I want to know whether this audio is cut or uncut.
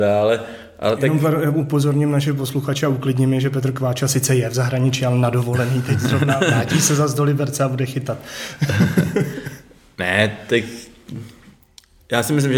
uncut